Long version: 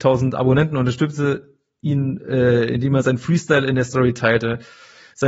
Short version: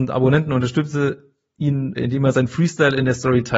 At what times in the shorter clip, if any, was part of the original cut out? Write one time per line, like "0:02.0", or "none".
0:02.0